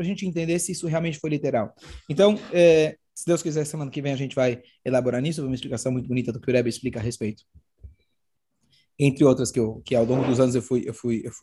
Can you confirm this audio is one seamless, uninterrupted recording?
yes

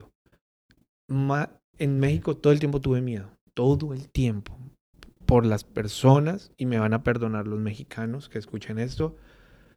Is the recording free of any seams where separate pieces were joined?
yes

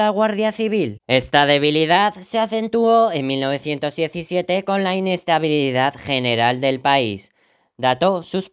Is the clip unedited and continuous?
no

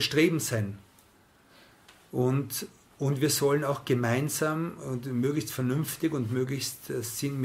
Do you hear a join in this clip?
no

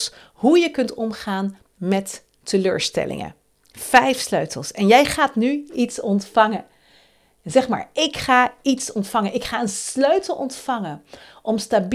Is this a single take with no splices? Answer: yes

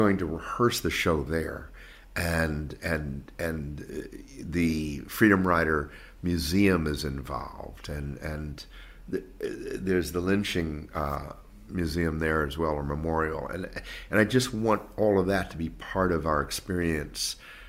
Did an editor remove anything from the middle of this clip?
no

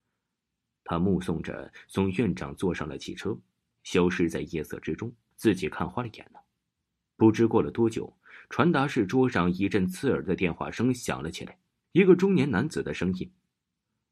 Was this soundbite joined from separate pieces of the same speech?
yes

